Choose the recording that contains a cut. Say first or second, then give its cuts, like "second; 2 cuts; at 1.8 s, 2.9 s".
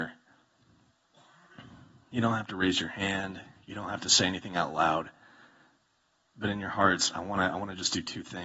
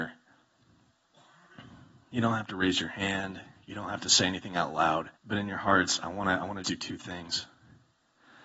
second; 2 cuts; at 5.2 s, 6.6 s